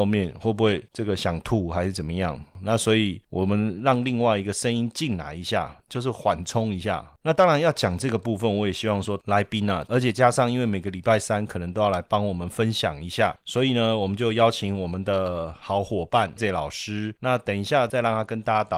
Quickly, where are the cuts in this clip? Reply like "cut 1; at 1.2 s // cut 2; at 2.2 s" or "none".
cut 1; at 9.9 s // cut 2; at 16.4 s